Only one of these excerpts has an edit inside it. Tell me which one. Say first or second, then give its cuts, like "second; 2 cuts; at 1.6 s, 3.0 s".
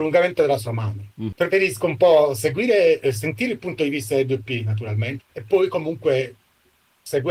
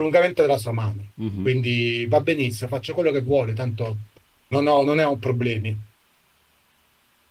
first; 2 cuts; at 1.3 s, 5.2 s